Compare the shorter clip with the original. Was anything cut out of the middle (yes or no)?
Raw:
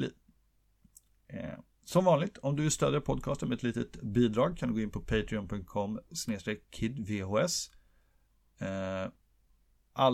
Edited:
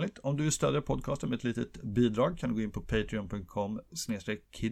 no